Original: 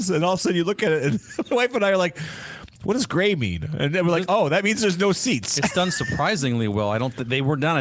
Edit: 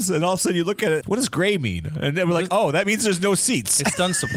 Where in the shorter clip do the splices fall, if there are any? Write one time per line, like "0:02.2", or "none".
0:01.0